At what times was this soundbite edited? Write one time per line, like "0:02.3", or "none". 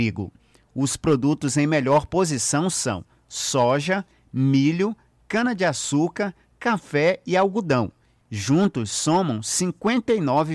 none